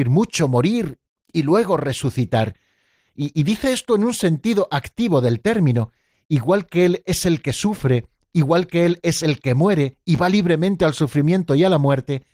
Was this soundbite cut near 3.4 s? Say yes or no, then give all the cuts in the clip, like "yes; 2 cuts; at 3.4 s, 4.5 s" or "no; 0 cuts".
no; 0 cuts